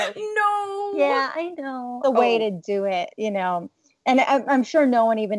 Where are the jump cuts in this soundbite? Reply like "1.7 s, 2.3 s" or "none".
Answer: 2.0 s